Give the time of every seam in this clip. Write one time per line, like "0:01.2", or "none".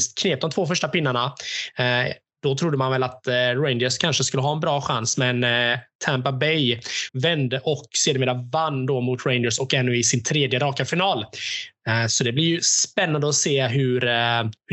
0:07.1